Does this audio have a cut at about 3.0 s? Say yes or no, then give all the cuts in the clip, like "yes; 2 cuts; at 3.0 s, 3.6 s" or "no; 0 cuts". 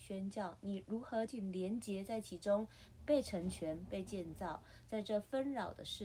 yes; 2 cuts; at 1.3 s, 3.0 s